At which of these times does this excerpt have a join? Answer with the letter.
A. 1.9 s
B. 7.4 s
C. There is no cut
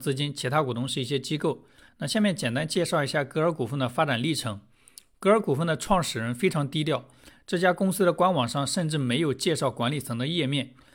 C